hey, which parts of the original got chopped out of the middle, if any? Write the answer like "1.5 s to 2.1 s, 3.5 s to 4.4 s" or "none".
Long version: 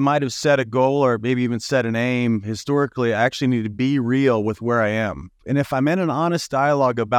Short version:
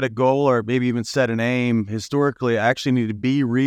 none